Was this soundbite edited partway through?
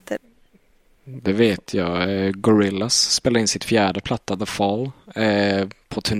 no; 0 cuts

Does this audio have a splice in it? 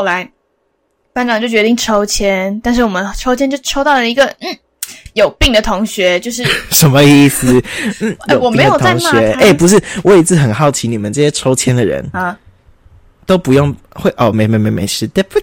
no; 0 cuts

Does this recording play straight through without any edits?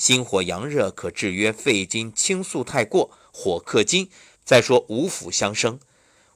no; 1 cut; at 4.3 s

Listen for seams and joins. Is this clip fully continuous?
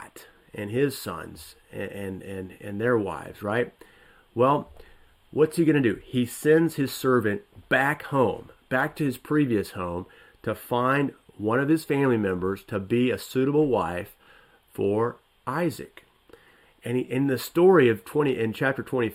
yes; 0 cuts

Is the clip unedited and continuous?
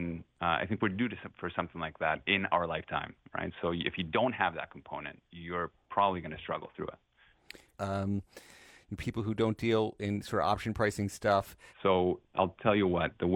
no; 2 cuts; at 7.8 s, 11.7 s

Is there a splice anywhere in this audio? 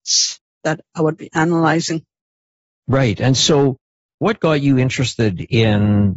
no; 0 cuts

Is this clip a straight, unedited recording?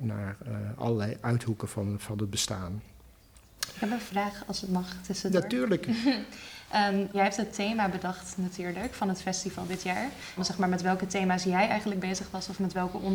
no; 2 cuts; at 7.1 s, 10.4 s

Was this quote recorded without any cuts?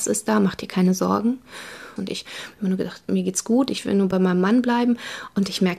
no; 1 cut; at 2.0 s

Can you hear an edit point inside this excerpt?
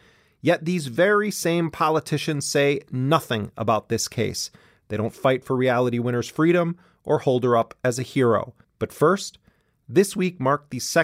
yes; 1 cut; at 8.6 s

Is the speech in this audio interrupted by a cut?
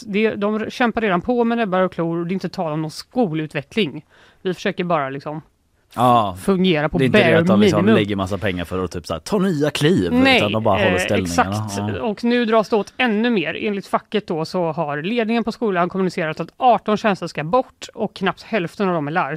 no; 0 cuts

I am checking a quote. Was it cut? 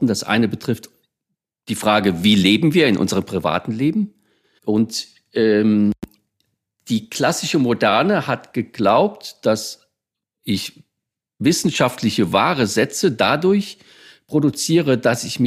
yes; 1 cut; at 4.6 s

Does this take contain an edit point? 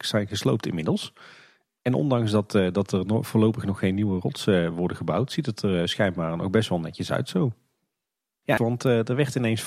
yes; 1 cut; at 8.6 s

